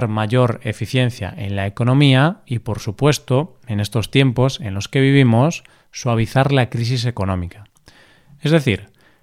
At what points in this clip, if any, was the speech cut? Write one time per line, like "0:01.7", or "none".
none